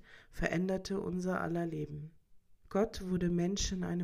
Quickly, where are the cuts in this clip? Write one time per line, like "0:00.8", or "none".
0:02.6